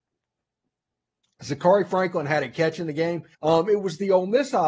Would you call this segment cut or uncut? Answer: cut